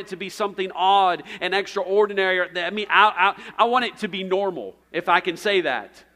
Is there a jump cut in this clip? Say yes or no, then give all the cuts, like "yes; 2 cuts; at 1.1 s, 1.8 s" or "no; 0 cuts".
yes; 1 cut; at 4.8 s